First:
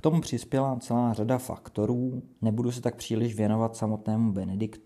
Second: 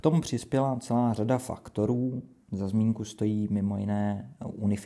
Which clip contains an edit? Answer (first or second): first